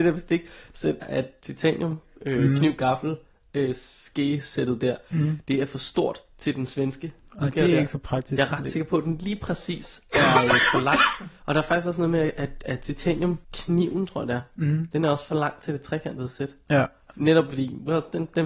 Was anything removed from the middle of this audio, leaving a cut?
yes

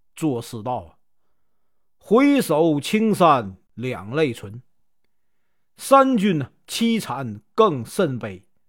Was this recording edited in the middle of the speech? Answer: no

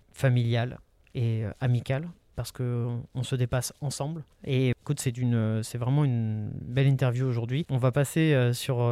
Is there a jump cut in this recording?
yes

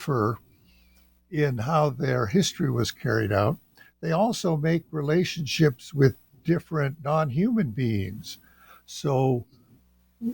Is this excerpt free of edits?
yes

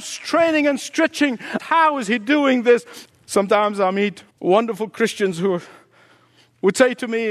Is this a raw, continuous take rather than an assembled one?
no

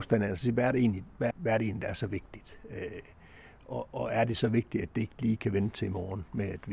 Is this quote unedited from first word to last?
no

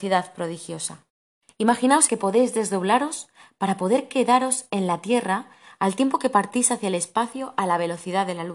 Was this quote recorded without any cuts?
no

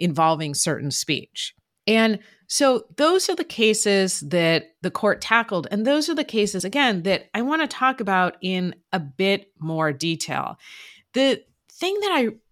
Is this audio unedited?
yes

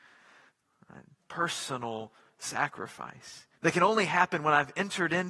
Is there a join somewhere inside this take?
yes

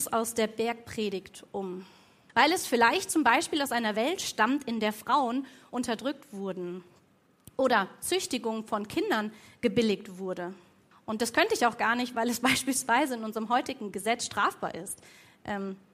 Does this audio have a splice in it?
yes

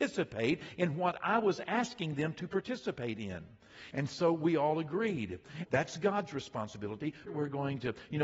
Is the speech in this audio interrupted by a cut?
yes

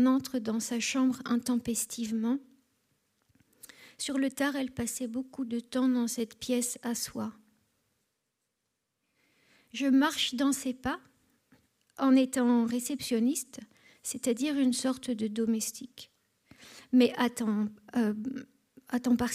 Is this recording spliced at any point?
no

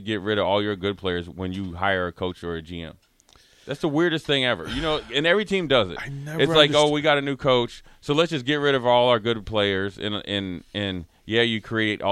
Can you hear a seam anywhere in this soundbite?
no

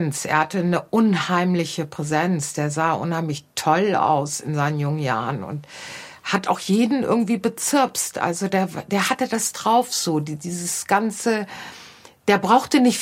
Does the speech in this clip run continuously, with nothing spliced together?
yes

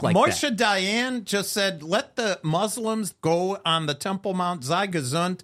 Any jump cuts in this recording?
yes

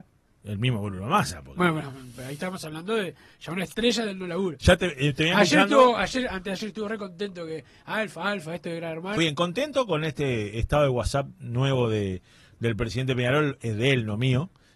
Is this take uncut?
no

